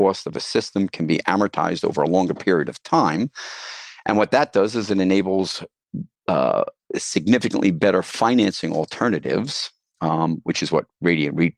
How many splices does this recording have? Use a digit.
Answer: 0